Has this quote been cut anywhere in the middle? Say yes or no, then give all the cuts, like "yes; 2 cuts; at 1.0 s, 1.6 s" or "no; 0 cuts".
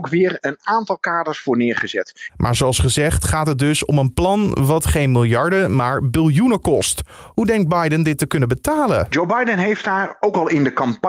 yes; 1 cut; at 2.3 s